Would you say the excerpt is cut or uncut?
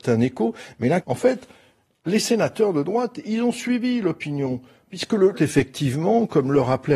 cut